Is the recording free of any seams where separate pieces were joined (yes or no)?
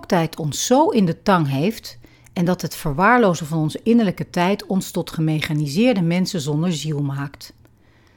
yes